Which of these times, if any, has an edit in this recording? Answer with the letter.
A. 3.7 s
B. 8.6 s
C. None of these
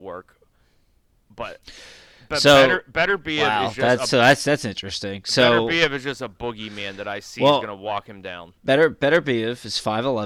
B